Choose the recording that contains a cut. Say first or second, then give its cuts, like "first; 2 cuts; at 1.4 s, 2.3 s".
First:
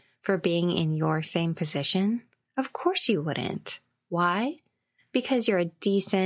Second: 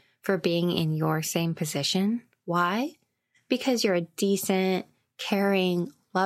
second; 1 cut; at 2.4 s